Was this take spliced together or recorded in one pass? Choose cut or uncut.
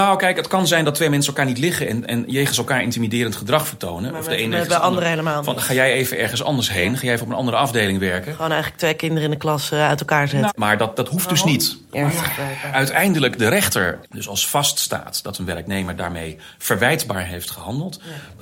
cut